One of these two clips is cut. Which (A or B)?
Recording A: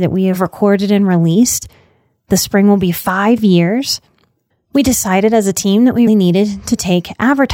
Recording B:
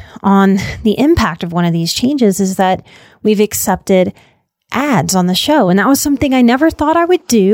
A